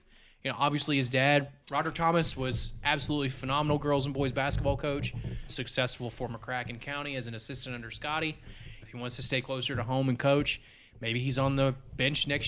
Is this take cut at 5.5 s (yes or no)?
yes